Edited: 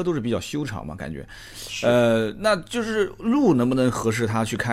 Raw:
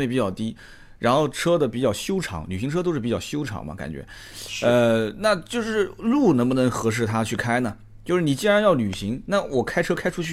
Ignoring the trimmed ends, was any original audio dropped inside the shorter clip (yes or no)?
no